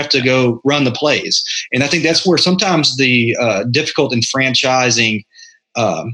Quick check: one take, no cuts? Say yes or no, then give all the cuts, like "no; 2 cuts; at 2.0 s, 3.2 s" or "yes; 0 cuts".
yes; 0 cuts